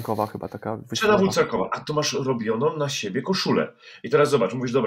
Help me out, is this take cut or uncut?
uncut